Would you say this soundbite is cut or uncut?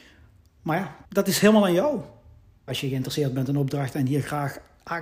cut